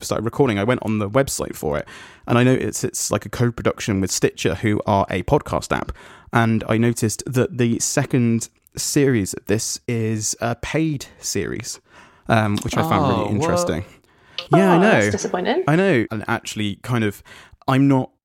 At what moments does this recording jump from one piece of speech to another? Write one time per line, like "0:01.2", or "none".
0:16.1